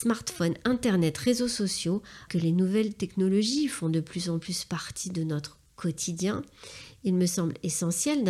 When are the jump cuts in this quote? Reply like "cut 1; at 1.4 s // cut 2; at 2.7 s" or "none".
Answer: cut 1; at 2.3 s